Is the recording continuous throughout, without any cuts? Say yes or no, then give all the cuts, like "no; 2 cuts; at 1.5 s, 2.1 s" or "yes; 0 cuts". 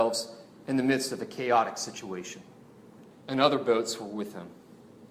no; 1 cut; at 3.1 s